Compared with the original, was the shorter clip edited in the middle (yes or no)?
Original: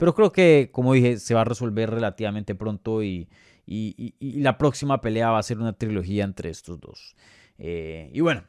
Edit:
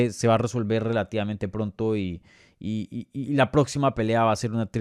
no